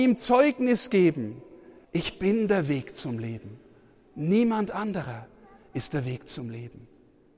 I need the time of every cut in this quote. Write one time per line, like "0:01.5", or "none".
0:01.8